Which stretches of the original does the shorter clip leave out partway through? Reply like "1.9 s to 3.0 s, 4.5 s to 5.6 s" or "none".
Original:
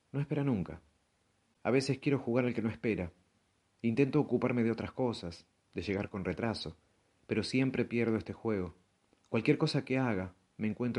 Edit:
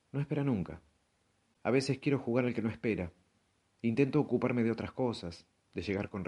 none